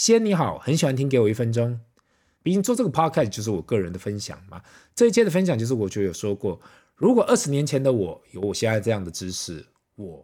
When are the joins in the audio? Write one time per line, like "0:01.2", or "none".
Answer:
0:02.4